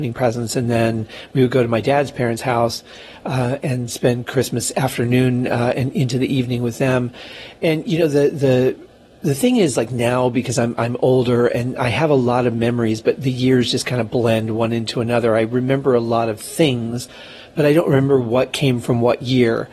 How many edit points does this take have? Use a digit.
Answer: 0